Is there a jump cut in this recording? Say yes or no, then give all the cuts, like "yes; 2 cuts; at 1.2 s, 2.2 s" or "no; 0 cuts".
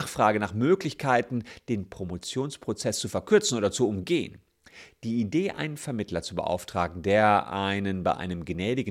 no; 0 cuts